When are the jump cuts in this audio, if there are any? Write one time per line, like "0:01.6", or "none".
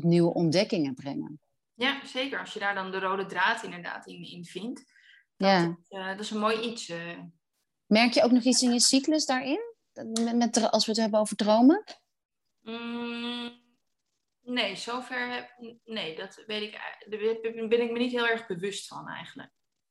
none

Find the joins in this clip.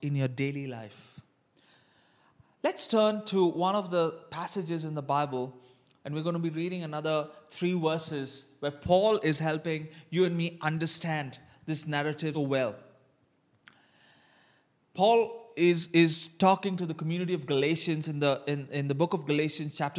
0:12.3

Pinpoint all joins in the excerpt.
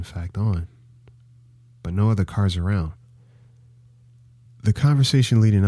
0:04.5

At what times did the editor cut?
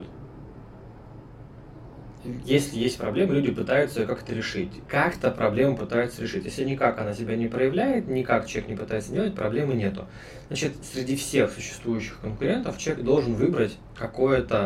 0:04.9

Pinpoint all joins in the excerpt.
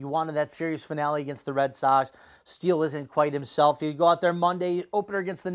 none

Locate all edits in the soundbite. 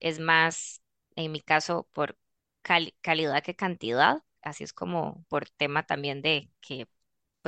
0:05.3

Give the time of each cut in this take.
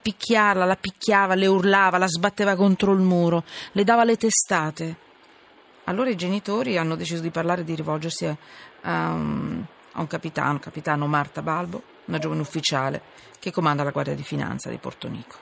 none

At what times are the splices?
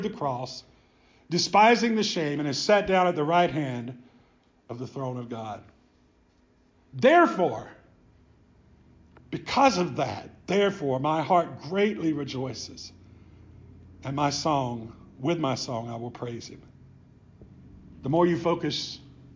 0:06.7

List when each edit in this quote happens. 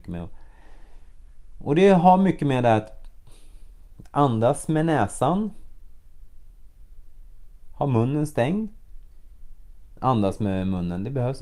0:10.0

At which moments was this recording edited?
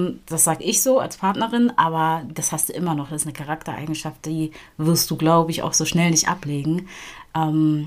none

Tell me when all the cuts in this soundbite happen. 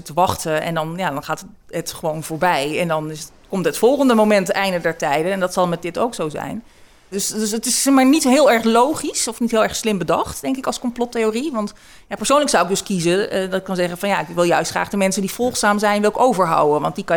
0:07.1

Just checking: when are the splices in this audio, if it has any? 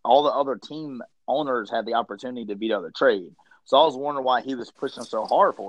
none

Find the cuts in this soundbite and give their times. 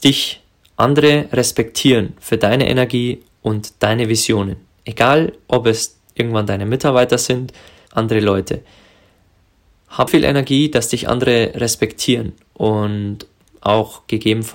0:07.9
0:10.1

